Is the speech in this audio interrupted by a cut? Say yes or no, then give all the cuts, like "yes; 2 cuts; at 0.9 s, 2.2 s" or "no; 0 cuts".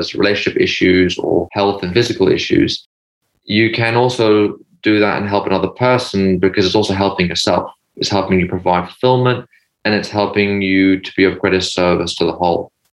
no; 0 cuts